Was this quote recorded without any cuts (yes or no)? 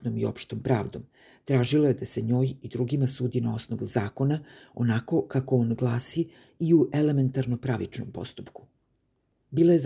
yes